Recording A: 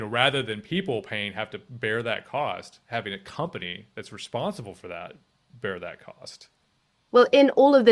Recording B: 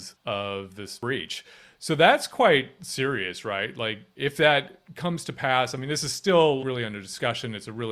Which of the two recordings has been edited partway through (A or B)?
B